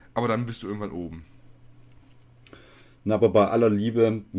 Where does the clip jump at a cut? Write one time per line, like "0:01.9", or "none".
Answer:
none